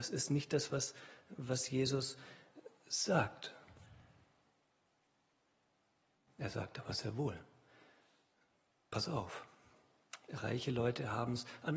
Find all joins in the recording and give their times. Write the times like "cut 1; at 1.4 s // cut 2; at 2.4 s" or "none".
none